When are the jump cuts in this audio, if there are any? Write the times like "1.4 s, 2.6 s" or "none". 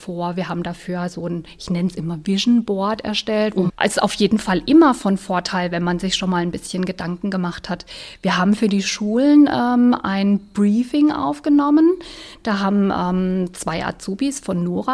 3.7 s